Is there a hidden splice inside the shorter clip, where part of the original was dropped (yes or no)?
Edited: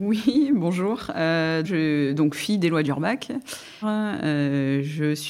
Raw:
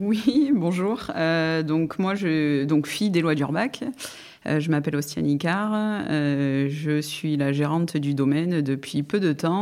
yes